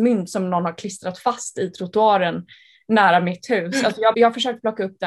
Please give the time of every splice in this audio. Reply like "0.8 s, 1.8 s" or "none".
4.1 s

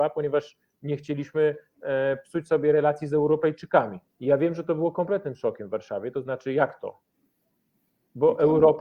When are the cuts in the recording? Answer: 4.1 s

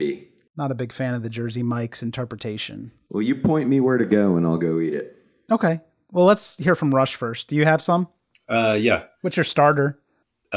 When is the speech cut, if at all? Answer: none

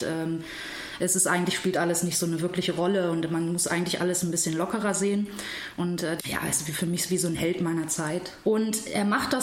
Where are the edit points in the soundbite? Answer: 6.2 s, 8.4 s

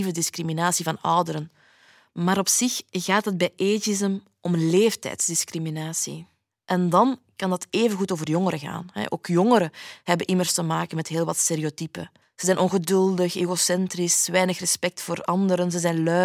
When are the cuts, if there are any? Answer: 12.2 s

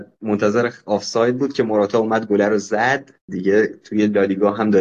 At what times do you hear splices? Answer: 3.2 s

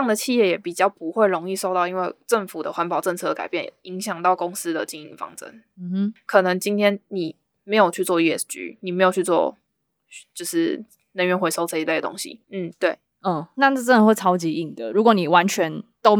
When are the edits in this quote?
12.4 s

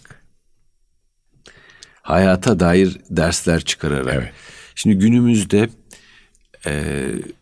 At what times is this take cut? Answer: none

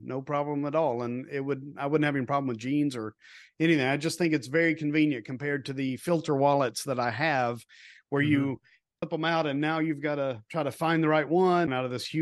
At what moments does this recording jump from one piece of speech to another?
none

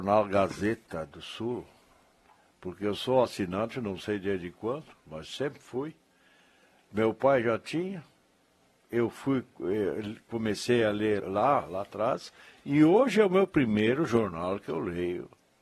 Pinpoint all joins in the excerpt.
11.2 s

